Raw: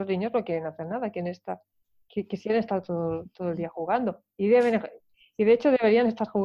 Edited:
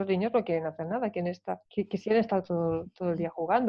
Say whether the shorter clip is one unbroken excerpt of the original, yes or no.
no